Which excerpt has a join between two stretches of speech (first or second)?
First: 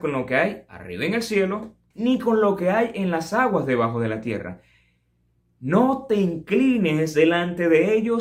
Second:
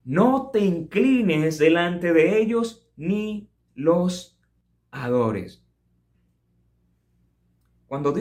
first